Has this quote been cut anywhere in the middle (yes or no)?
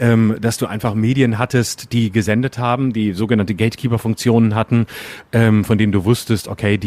no